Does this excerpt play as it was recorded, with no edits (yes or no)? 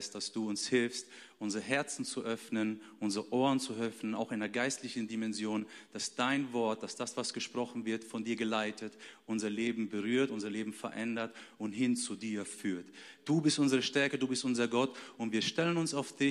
no